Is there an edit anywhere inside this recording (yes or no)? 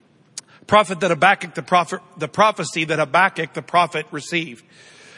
no